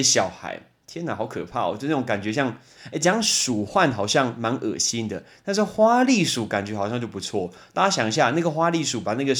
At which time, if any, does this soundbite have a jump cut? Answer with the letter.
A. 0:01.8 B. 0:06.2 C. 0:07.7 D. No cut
D